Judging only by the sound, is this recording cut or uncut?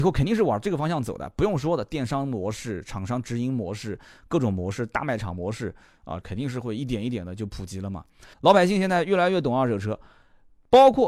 cut